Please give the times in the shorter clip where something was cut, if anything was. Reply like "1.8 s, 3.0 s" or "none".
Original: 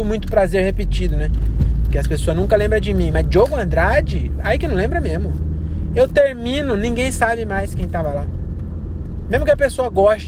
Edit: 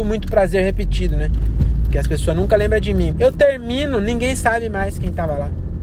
3.1 s